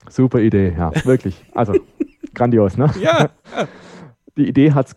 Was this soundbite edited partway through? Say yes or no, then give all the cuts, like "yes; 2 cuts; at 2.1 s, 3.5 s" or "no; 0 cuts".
no; 0 cuts